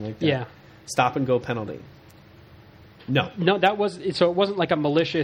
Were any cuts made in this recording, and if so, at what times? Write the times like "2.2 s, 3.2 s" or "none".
3.0 s